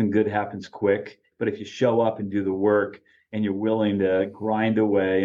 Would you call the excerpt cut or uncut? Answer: cut